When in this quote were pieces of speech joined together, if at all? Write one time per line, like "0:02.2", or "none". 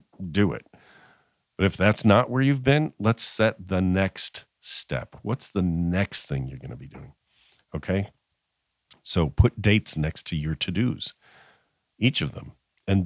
none